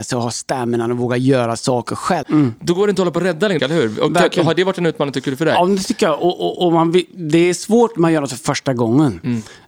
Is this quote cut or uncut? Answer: cut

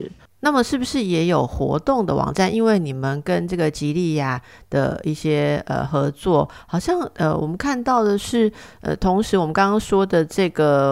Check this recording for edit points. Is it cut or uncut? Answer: uncut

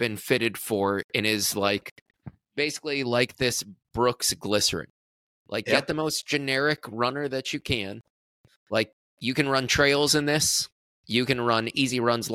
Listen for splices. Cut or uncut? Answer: uncut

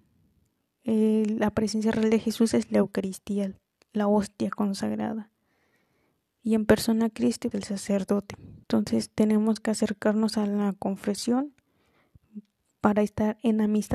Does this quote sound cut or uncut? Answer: cut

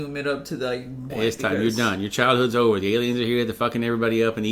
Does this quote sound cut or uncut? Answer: cut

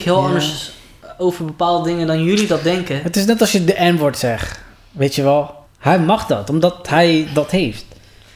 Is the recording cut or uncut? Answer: cut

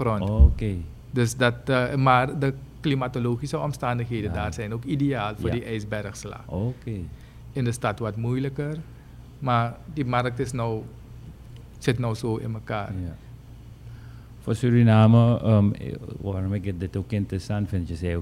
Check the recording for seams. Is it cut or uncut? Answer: cut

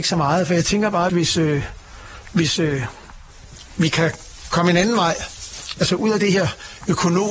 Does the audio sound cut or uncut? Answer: cut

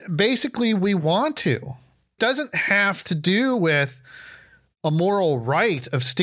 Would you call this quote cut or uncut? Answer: cut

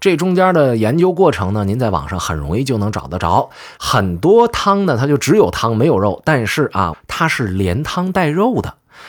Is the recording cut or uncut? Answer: cut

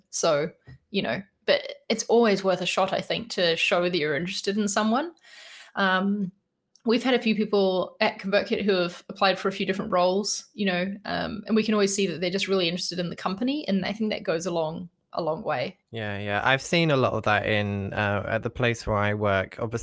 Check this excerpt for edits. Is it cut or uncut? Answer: cut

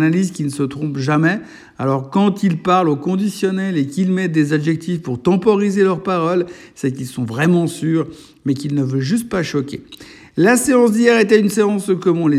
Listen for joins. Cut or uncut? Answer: uncut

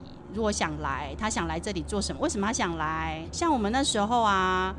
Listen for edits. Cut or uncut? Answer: cut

